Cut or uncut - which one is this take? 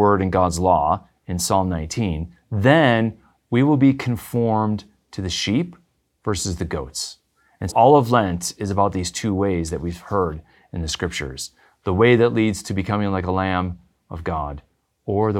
cut